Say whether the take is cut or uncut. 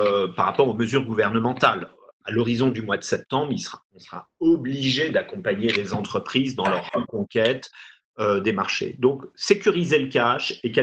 uncut